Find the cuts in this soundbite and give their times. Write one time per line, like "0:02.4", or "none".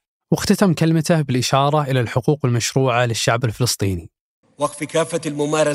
0:04.4